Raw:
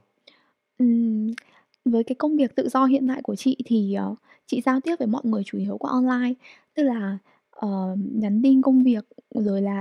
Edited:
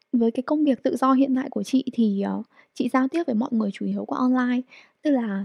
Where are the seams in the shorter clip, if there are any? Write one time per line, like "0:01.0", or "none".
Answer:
none